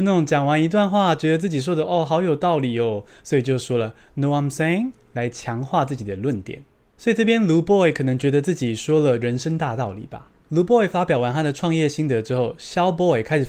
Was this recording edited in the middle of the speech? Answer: no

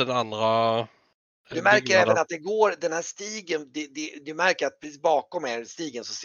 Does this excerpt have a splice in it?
no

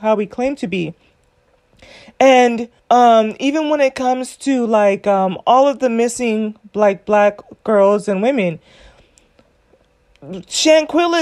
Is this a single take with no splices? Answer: no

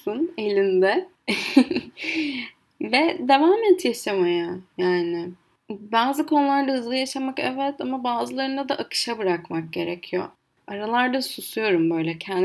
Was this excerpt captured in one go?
yes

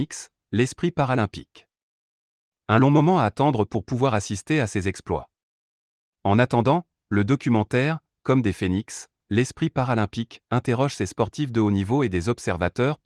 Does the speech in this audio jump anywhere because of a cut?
yes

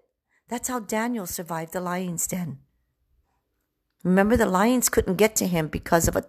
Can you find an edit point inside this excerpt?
no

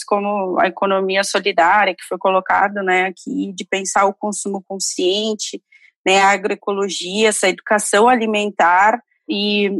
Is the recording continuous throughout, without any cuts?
yes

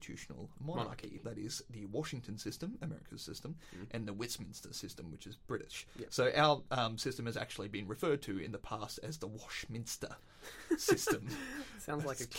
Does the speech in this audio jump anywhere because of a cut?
yes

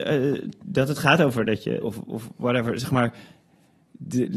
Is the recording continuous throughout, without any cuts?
no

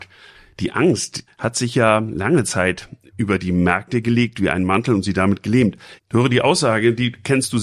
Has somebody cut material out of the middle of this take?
yes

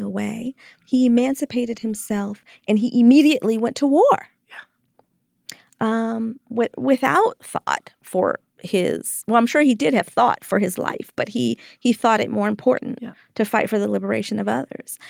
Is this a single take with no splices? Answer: yes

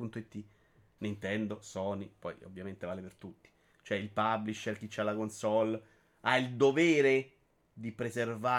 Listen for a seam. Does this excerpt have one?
yes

